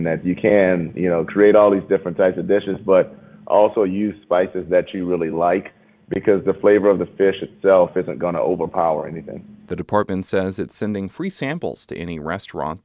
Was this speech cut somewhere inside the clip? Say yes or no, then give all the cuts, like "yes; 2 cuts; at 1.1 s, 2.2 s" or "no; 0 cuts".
no; 0 cuts